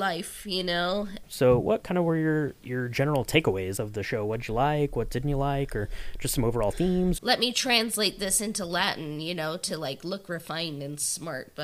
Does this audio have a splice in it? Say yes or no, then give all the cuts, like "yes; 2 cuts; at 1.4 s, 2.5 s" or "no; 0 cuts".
yes; 3 cuts; at 1.2 s, 3.8 s, 7.2 s